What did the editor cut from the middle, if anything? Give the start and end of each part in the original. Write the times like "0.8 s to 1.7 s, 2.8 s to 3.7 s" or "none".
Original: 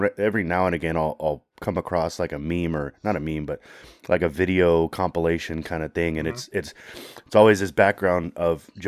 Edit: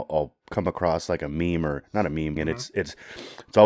3.5 s to 6.1 s